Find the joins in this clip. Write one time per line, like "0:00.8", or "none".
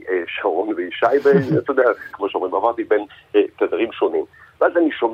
0:02.1